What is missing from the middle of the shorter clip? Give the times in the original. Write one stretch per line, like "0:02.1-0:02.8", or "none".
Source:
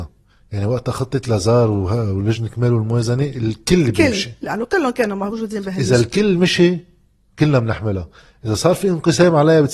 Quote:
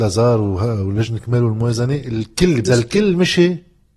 0:03.9-0:05.9